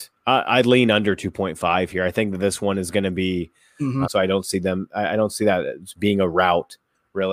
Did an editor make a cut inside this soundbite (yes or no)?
yes